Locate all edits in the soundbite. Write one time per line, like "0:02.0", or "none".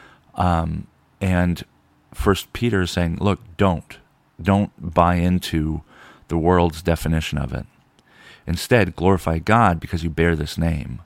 none